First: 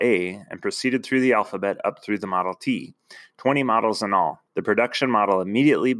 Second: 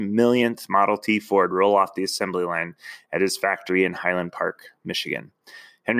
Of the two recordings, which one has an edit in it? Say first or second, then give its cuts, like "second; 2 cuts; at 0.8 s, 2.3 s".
first; 1 cut; at 4.5 s